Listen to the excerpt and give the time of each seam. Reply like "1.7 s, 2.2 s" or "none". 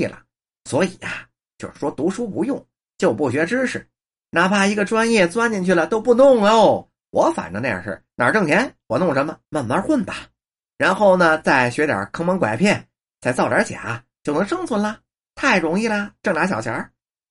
9.4 s

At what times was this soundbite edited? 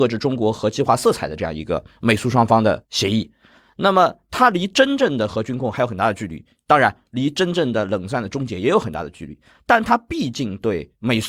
none

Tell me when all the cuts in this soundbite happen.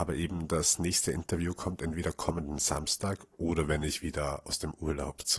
none

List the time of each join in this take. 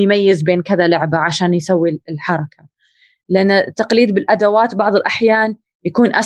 none

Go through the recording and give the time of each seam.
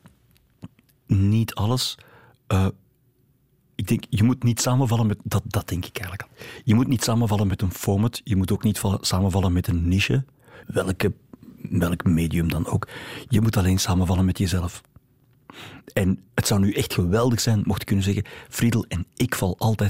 10.6 s, 16.3 s

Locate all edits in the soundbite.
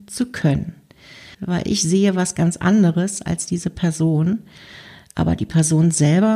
1.3 s

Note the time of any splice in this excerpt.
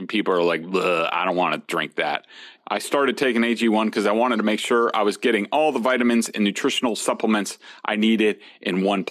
2.6 s

